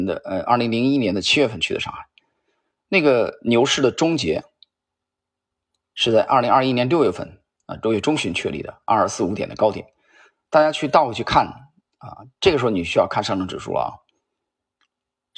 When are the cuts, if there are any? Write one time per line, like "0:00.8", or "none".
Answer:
none